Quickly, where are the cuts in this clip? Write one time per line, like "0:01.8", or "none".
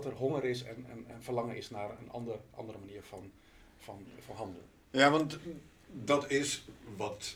none